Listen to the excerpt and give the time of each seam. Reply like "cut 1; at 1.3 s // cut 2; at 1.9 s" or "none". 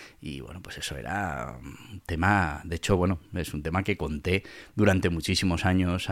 none